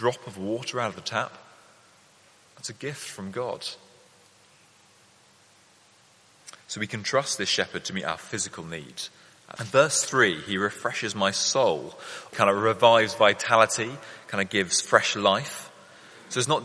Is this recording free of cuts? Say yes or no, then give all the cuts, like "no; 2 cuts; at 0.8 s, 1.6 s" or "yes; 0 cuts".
no; 2 cuts; at 9.6 s, 12.3 s